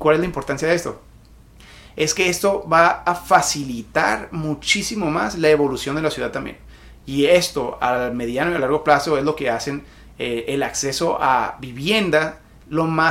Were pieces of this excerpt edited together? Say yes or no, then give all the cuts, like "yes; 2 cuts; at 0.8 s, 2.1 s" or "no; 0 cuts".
no; 0 cuts